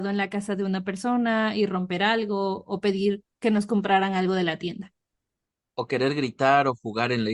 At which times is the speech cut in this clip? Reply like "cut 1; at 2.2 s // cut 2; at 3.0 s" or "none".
cut 1; at 3.3 s